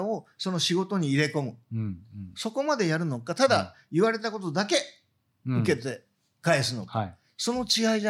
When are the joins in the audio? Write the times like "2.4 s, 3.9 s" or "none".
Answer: none